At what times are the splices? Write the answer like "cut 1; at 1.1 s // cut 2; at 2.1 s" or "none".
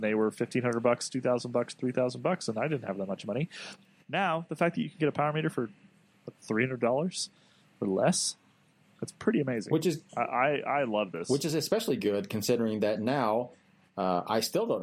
none